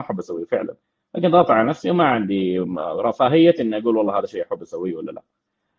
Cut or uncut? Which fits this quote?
uncut